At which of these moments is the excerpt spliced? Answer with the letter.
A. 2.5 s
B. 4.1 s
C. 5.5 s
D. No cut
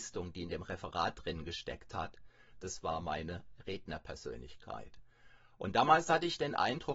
A